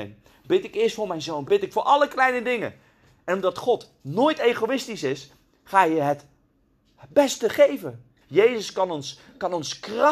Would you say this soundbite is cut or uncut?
cut